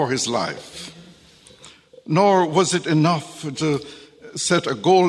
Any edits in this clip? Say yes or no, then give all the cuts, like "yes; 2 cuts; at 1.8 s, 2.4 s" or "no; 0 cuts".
yes; 1 cut; at 3.5 s